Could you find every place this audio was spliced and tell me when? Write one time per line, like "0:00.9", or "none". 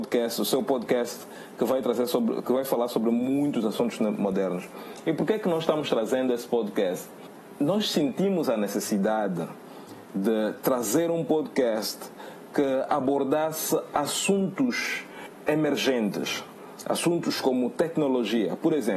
none